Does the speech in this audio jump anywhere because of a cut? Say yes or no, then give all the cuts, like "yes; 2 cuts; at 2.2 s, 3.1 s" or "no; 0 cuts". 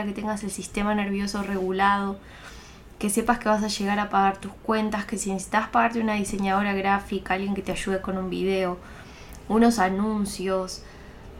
no; 0 cuts